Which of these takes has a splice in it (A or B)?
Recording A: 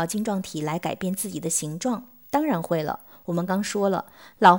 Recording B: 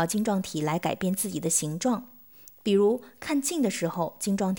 A